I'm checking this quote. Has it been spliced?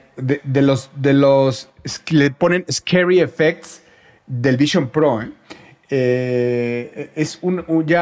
no; 0 cuts

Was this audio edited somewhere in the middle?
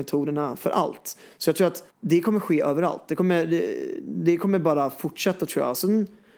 yes; 1 cut; at 1.9 s

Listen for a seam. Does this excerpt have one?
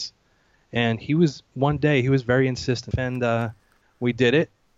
yes; 1 cut; at 2.9 s

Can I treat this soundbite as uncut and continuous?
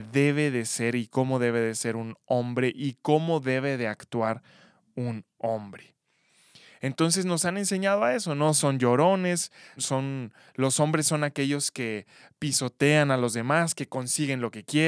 no; 1 cut; at 9.8 s

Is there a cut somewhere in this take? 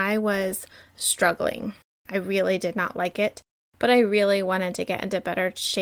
no; 0 cuts

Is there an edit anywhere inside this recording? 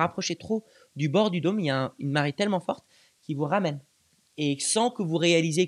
no; 0 cuts

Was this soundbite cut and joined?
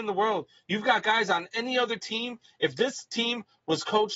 no; 0 cuts

